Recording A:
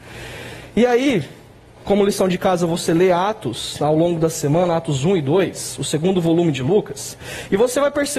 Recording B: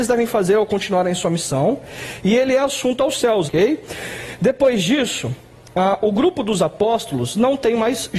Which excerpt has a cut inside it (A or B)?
B